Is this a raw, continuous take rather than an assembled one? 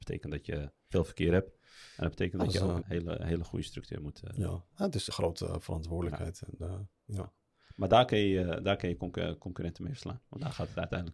no; 2 cuts; at 2.8 s, 5.1 s

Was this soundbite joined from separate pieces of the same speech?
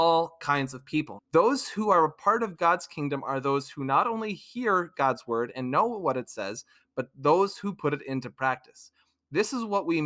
yes; 1 cut; at 1.2 s

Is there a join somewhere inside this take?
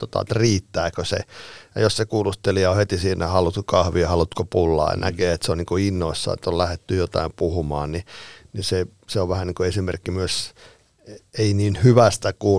no; 0 cuts

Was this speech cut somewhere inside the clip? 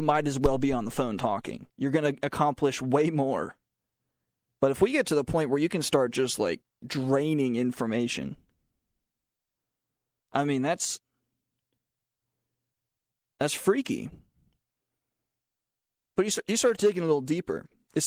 yes; 2 cuts; at 1.7 s, 4.5 s

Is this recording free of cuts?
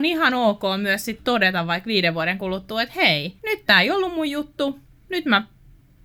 no; 1 cut; at 3.4 s

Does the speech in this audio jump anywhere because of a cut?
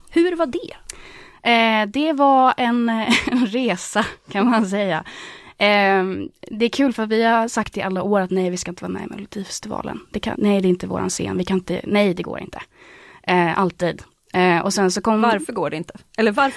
yes; 1 cut; at 10.3 s

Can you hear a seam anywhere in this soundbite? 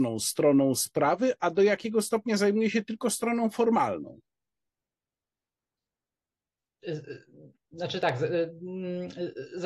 yes; 1 cut; at 6.8 s

